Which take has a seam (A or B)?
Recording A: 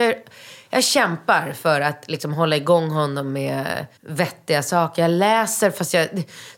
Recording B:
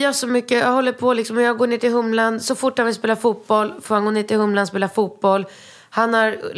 A